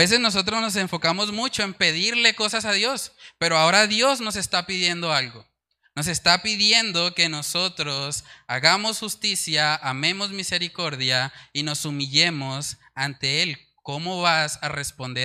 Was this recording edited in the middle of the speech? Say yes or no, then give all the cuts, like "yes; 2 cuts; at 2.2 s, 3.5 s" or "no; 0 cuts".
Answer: no; 0 cuts